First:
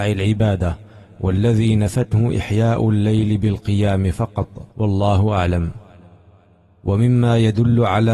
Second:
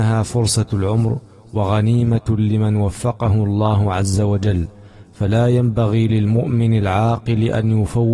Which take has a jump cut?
first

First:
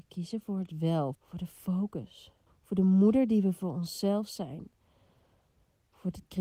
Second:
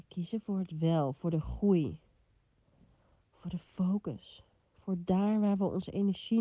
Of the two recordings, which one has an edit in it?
first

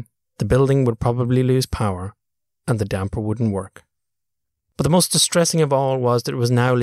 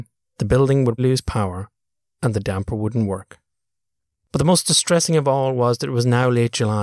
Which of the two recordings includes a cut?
second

